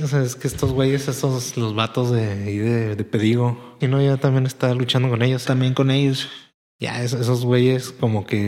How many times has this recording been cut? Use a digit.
2